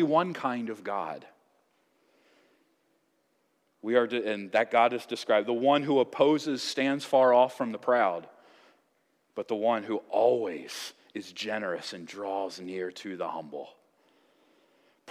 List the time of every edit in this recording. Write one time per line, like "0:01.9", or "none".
none